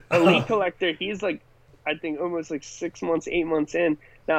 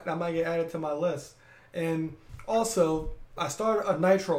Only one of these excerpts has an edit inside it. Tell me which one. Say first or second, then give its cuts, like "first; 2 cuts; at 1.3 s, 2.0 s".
second; 1 cut; at 3.4 s